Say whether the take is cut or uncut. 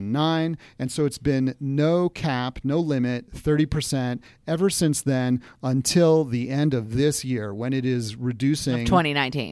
uncut